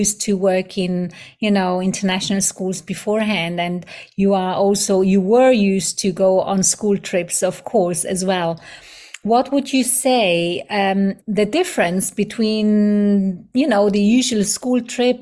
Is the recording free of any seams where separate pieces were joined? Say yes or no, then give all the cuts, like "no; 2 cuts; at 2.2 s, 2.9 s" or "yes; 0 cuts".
no; 1 cut; at 11.2 s